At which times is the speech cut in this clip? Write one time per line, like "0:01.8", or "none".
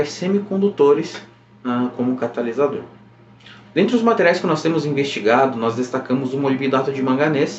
0:03.6